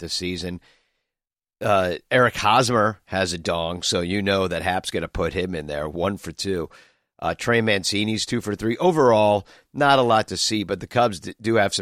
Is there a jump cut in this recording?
no; 0 cuts

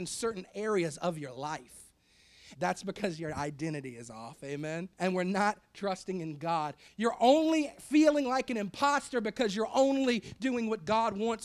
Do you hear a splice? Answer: yes; 3 cuts; at 2.5 s, 4.9 s, 6.9 s

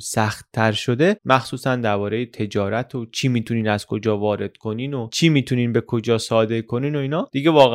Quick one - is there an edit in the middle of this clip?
yes; 1 cut; at 1.1 s

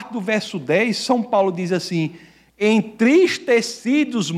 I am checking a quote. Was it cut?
no; 0 cuts

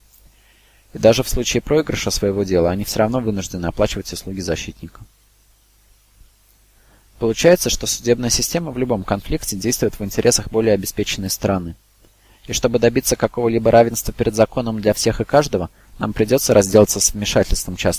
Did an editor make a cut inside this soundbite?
no; 0 cuts

